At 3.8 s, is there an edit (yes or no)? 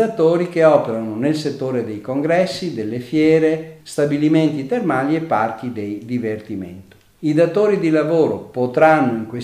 yes